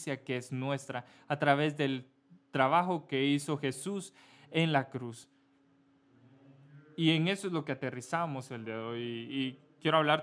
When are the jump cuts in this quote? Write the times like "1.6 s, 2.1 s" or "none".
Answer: none

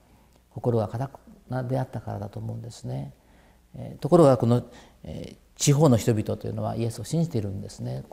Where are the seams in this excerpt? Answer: none

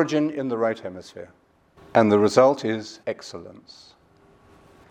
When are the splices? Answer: 1.8 s, 3.0 s

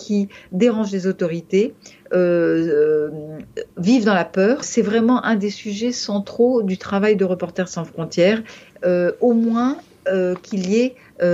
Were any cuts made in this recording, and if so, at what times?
4.6 s, 8.7 s

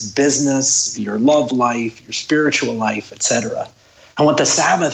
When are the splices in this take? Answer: 0.9 s

